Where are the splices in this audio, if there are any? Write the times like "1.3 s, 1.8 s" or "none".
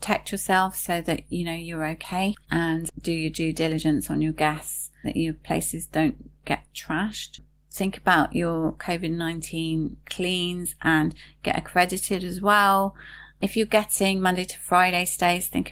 2.4 s, 5.0 s